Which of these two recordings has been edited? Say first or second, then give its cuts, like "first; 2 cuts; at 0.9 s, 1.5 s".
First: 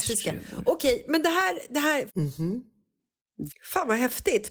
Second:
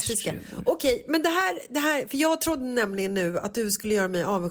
first; 2 cuts; at 2.1 s, 3.5 s